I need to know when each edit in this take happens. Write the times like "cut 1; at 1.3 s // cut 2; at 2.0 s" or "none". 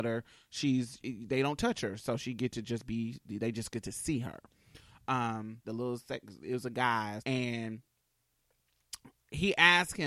cut 1; at 1.0 s // cut 2; at 5.6 s // cut 3; at 7.2 s